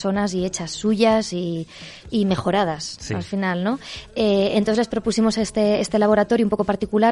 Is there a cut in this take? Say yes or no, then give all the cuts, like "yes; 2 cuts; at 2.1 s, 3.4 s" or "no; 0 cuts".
no; 0 cuts